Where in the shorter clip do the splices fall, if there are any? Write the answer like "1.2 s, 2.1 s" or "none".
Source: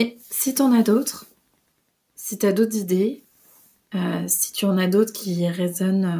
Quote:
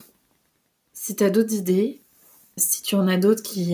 2.6 s

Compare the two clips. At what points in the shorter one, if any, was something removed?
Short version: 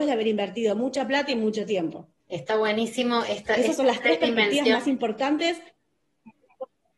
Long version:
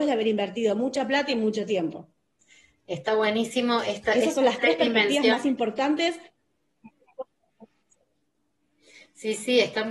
2.2 s

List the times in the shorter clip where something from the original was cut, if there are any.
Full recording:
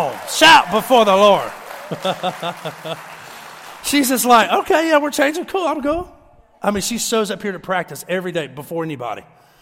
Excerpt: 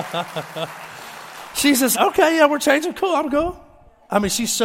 1.9 s

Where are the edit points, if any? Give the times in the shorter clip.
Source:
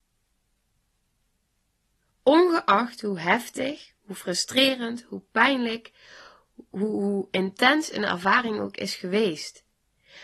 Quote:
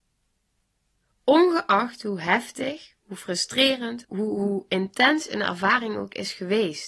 4.0 s

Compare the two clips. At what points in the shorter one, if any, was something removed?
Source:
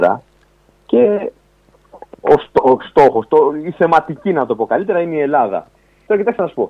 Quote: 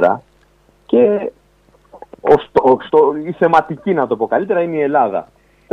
2.9 s

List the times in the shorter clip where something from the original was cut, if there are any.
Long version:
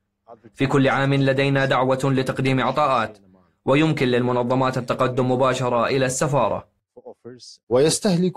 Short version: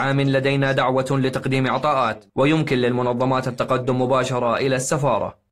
2.3 s

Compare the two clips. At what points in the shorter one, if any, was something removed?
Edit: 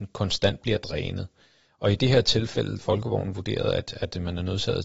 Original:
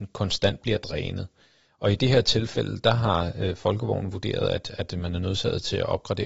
2.8 s

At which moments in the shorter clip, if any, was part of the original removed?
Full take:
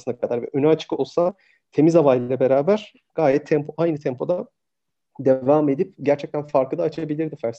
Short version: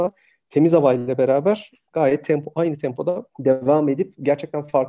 3.3 s

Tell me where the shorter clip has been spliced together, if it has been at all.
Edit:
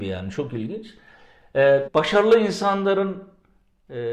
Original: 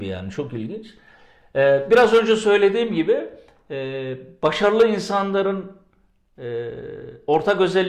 1.9 s

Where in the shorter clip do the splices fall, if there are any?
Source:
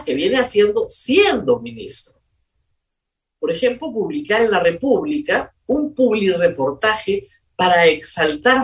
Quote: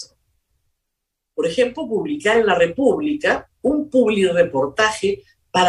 none

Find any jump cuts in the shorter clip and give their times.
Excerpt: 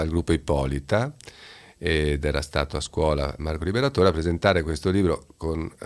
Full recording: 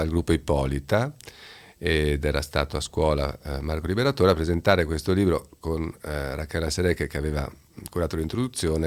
3.4 s

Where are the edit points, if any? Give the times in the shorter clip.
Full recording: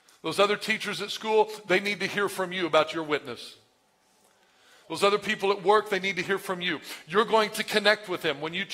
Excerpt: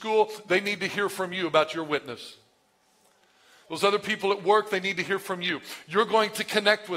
none

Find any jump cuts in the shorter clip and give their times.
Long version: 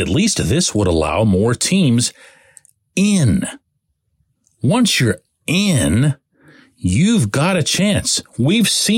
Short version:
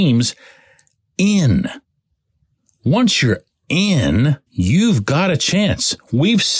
4.5 s

